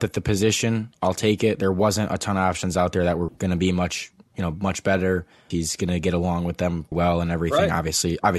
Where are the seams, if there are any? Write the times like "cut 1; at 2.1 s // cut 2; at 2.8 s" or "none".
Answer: cut 1; at 3.3 s // cut 2; at 5.5 s // cut 3; at 6.9 s

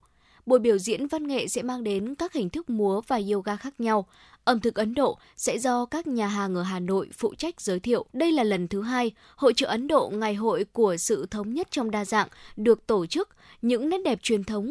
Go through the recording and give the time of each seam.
cut 1; at 8.1 s

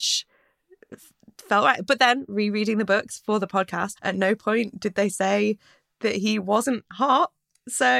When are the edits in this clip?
cut 1; at 4.0 s

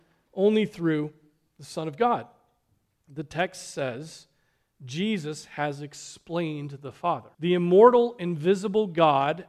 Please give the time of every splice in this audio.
cut 1; at 7.3 s

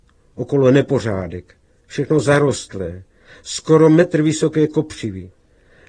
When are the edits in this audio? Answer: none

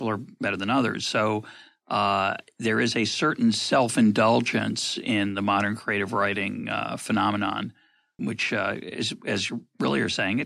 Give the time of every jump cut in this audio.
cut 1; at 8.2 s

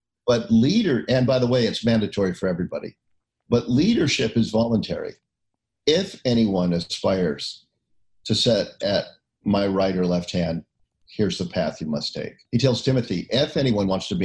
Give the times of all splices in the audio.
cut 1; at 12.5 s

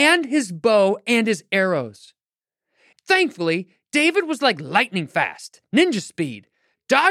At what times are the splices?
cut 1; at 2.9 s

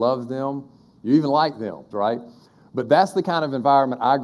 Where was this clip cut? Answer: cut 1; at 1.9 s

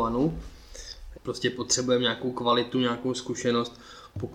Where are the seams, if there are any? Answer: cut 1; at 1.1 s

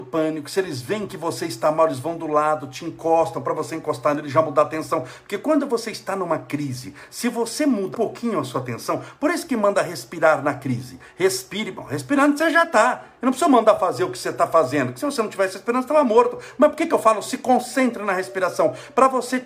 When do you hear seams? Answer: cut 1; at 7.9 s

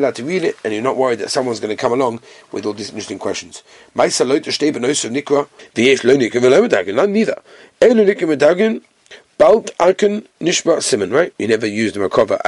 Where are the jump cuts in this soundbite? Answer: cut 1; at 5.6 s // cut 2; at 11.3 s

